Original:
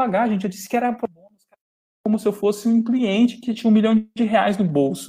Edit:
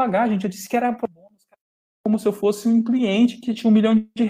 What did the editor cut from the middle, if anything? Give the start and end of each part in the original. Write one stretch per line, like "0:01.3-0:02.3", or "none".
none